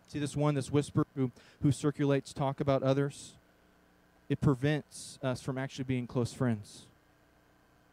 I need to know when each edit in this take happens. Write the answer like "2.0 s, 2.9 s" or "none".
none